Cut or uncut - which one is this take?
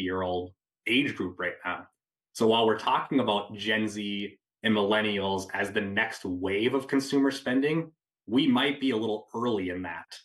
uncut